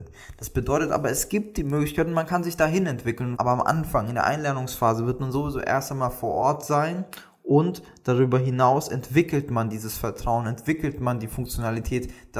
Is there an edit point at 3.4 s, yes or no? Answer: yes